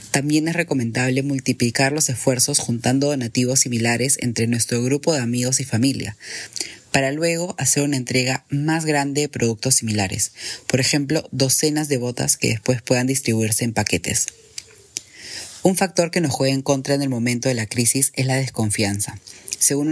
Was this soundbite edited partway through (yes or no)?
no